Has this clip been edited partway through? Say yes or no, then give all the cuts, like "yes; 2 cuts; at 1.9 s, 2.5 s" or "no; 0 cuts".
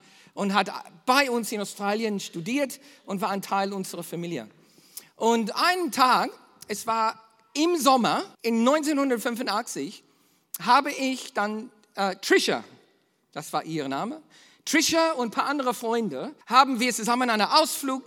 yes; 2 cuts; at 8.3 s, 16.4 s